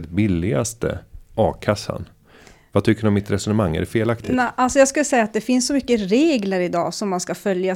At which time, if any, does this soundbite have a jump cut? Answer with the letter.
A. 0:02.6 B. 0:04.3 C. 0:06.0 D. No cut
D